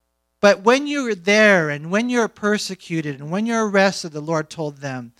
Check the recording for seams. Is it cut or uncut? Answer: uncut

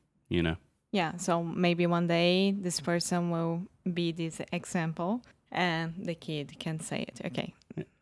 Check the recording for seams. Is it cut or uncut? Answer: uncut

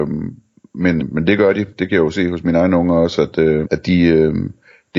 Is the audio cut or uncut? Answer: cut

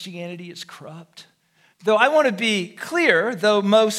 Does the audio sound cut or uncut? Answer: cut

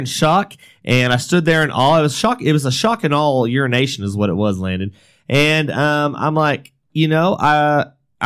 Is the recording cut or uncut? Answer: uncut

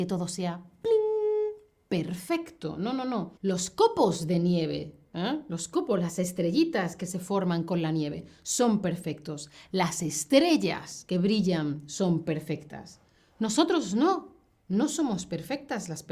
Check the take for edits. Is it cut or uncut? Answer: cut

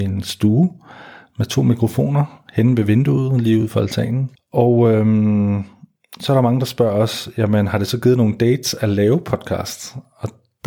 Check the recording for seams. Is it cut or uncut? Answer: cut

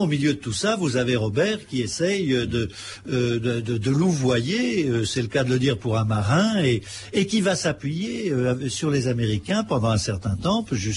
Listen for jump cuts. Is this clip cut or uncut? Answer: uncut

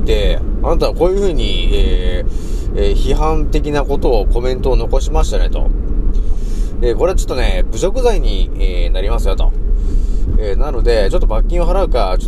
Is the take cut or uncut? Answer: uncut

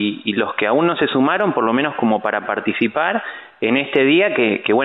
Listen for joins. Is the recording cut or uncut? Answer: uncut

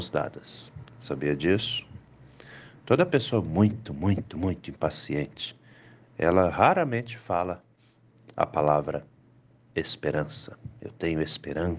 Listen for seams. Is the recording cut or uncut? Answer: uncut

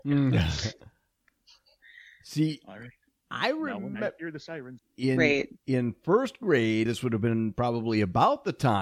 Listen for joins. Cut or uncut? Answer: cut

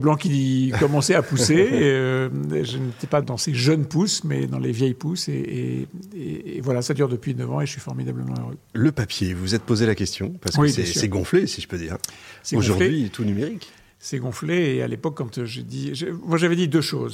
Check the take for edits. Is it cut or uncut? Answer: cut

